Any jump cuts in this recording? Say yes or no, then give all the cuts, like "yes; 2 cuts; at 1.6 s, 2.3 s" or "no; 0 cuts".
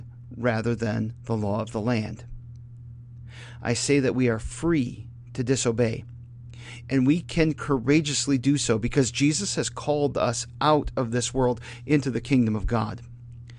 no; 0 cuts